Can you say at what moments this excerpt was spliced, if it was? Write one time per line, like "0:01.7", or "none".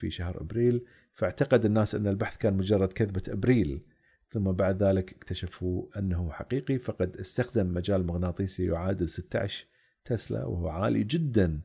none